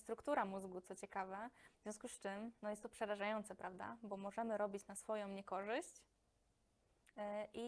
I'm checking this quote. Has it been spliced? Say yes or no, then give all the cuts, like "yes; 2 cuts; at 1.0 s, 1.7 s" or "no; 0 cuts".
no; 0 cuts